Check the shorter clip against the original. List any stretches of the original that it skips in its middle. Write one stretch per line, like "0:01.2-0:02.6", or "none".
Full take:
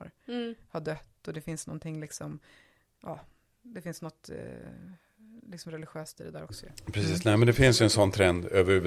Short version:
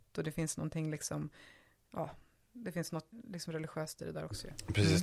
0:04.2-0:05.3